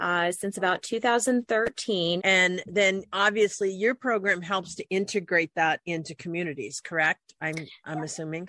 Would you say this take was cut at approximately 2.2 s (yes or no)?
yes